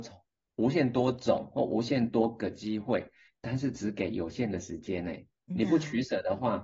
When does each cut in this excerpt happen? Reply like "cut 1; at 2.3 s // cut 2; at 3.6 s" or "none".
cut 1; at 5.5 s